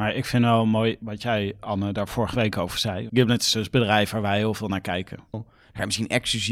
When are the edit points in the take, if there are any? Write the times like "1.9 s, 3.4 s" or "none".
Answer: 3.1 s, 5.3 s